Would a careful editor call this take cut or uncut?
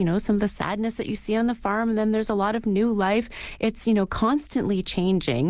uncut